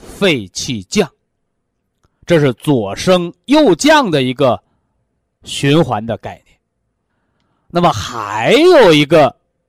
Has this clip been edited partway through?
no; 0 cuts

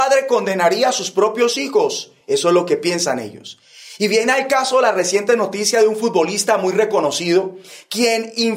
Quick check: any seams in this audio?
no; 0 cuts

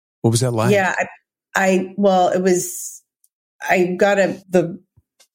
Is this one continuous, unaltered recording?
no; 1 cut; at 4.4 s

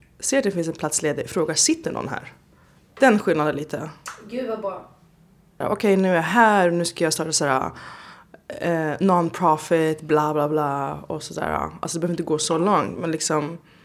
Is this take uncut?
no; 1 cut; at 5.6 s

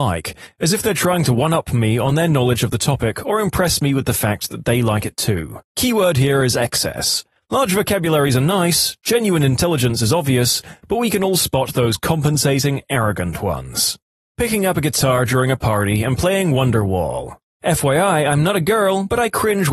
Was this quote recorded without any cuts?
yes; 0 cuts

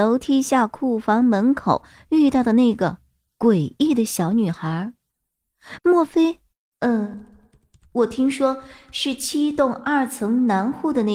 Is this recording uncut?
no; 1 cut; at 6.7 s

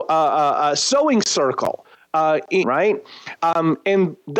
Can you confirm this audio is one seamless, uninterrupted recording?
no; 1 cut; at 2.6 s

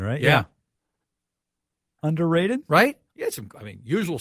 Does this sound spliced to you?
yes; 2 cuts; at 2.0 s, 3.1 s

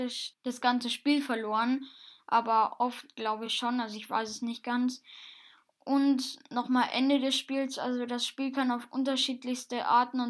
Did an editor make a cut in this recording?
no; 0 cuts

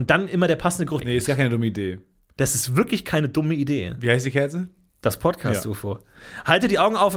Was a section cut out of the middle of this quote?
yes; 1 cut; at 1.0 s

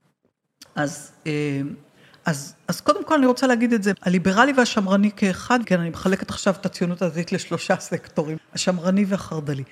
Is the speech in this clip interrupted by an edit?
yes; 3 cuts; at 3.9 s, 5.6 s, 8.4 s

